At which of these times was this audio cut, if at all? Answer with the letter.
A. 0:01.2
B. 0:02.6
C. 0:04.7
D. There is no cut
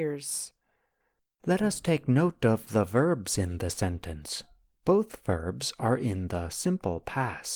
C